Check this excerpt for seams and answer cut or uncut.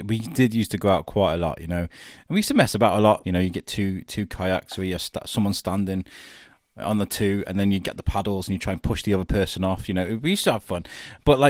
cut